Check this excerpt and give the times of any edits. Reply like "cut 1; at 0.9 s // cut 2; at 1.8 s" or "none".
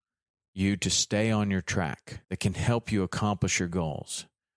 cut 1; at 2.2 s